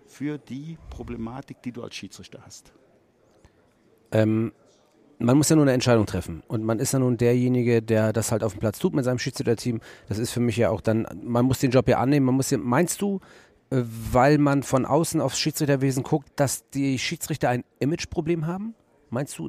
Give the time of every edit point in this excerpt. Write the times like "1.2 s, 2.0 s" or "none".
16.2 s